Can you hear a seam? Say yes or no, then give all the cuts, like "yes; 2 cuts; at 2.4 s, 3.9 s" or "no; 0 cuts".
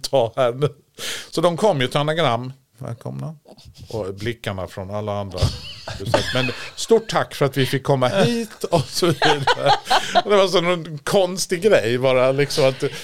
yes; 2 cuts; at 2.7 s, 6.0 s